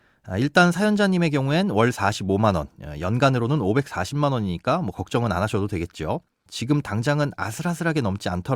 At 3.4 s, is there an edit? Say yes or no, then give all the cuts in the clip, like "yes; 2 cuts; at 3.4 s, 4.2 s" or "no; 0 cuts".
no; 1 cut; at 6.5 s